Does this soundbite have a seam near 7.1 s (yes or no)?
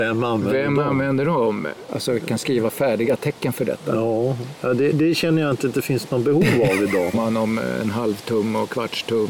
yes